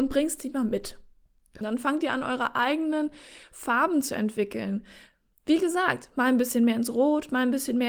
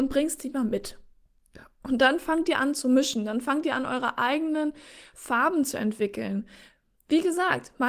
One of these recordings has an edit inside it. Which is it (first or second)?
first